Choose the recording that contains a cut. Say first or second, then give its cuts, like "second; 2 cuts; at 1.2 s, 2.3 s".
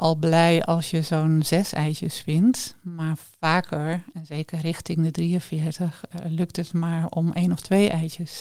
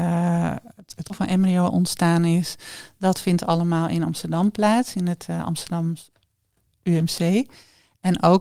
second; 1 cut; at 1.1 s